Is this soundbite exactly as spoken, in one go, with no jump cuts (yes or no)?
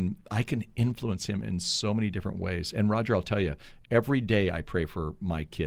yes